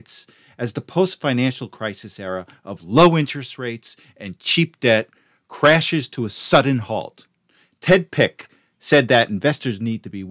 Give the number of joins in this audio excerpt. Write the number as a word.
zero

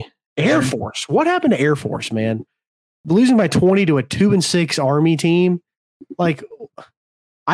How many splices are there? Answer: zero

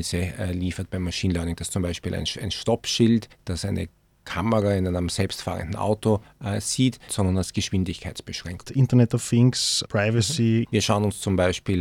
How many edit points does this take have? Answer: three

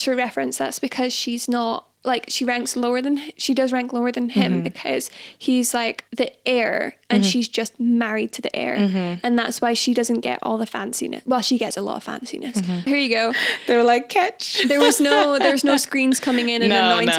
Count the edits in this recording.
three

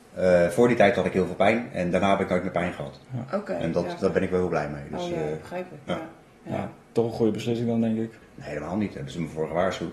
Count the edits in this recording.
one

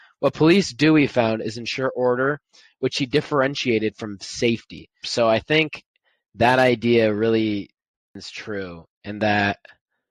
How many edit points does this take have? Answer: one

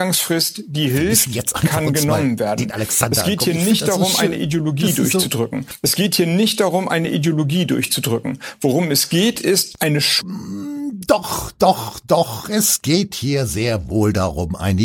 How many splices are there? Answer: zero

